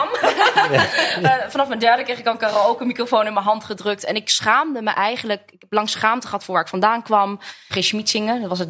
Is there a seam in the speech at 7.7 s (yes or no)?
yes